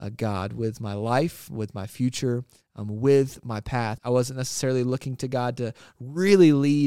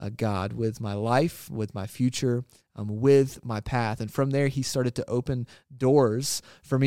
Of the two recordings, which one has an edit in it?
first; 1 cut; at 4.0 s

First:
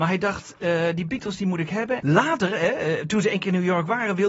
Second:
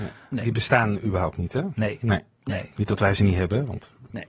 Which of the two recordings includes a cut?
first; 1 cut; at 2.0 s

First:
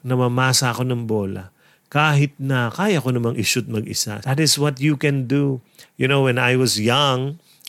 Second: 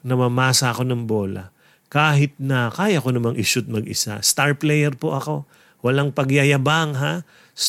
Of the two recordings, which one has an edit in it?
first; 2 cuts; at 4.2 s, 5.8 s

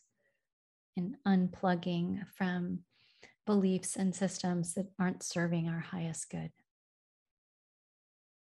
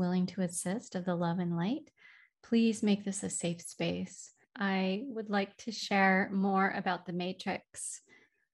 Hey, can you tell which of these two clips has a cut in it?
second; 1 cut; at 4.4 s

